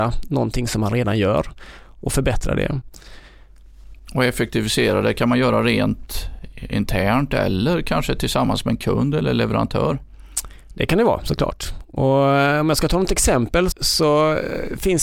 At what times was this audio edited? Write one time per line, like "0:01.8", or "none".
0:13.7